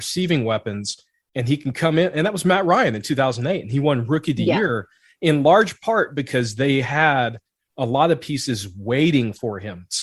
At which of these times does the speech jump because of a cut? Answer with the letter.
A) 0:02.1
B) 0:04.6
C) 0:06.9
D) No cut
D